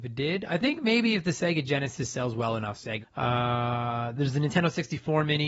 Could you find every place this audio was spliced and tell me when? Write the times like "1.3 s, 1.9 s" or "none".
3.0 s